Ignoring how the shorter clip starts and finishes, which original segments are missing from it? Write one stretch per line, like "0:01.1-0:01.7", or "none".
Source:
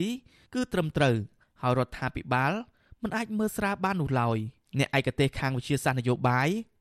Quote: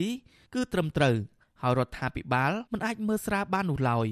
0:02.7-0:03.0